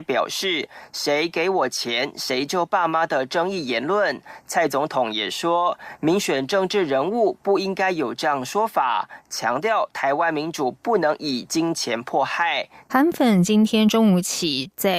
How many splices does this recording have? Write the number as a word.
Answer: one